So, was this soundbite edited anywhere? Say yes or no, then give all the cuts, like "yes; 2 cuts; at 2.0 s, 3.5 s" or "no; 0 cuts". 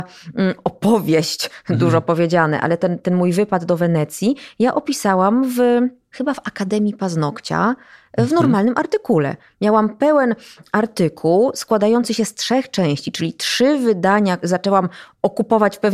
no; 0 cuts